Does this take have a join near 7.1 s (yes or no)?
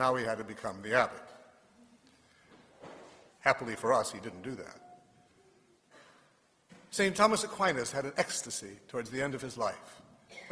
yes